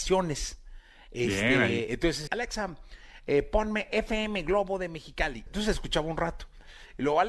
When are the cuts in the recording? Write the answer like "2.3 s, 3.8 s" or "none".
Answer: 2.3 s, 5.5 s